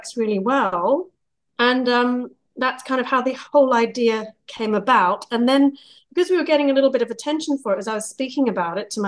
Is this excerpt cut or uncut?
uncut